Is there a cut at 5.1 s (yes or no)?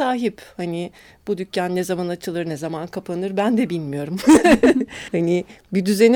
yes